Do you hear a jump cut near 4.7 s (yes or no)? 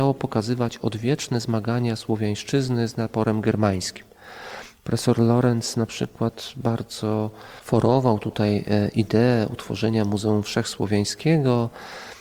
yes